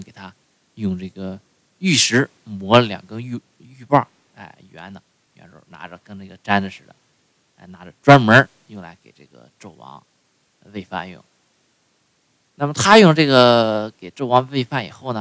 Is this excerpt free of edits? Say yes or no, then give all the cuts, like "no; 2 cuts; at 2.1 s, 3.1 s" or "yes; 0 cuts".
yes; 0 cuts